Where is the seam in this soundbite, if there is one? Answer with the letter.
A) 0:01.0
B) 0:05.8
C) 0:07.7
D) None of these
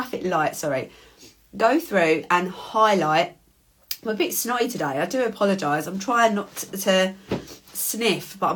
D